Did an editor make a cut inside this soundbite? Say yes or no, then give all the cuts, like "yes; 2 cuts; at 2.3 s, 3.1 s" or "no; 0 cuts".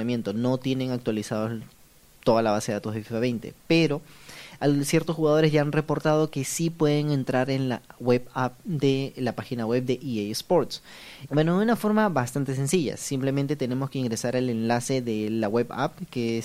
yes; 1 cut; at 11.3 s